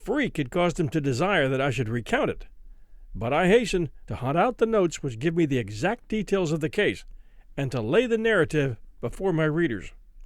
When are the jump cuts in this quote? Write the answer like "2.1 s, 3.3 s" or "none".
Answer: 4.1 s